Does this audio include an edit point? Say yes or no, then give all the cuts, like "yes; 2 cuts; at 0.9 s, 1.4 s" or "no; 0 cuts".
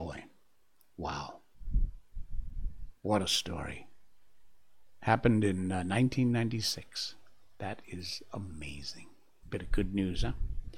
yes; 1 cut; at 9.4 s